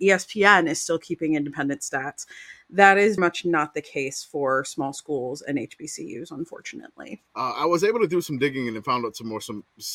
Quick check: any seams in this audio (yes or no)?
yes